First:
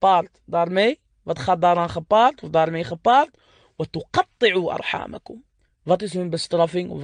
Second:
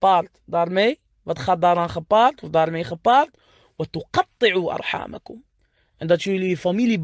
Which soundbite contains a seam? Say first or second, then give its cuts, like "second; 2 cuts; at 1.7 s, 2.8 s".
first; 1 cut; at 5.7 s